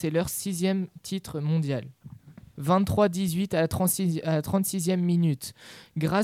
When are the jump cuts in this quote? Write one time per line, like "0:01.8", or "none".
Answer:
0:02.5